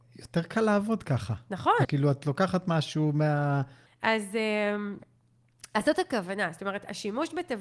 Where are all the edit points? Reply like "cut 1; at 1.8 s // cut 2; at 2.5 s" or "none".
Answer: cut 1; at 1.8 s // cut 2; at 3.9 s